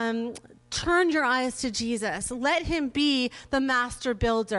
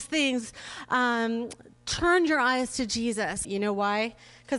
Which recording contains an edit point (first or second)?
second